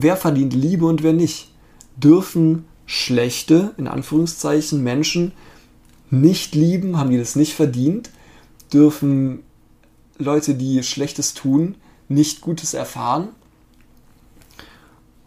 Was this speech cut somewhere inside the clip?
no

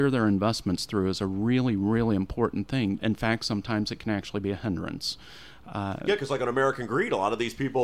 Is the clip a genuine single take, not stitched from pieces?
no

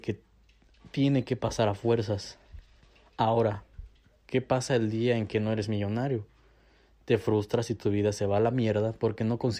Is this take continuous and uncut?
yes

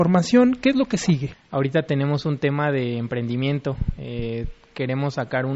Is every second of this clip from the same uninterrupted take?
yes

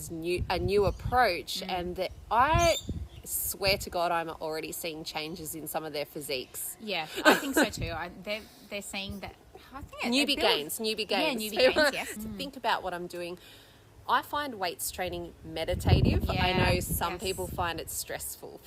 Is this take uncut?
no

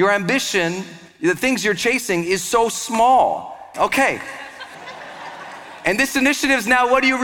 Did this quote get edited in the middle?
yes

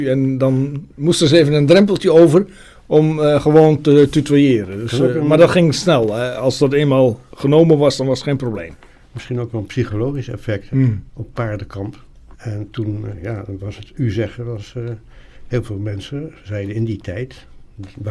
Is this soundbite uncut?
no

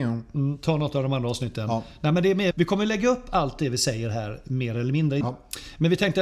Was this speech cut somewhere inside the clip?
yes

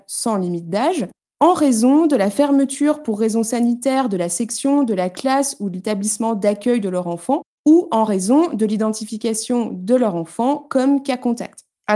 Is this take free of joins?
yes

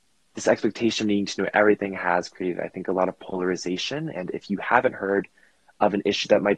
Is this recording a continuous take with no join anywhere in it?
yes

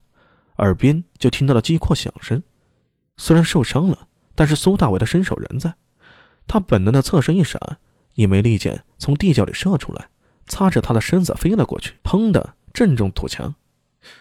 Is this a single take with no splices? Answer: no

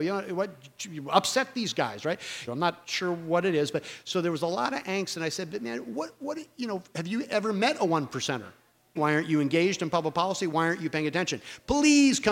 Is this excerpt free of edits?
no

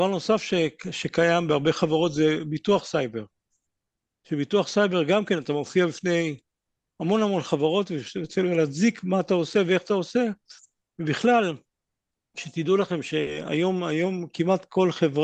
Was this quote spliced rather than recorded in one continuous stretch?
no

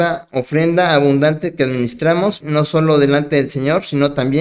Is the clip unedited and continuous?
no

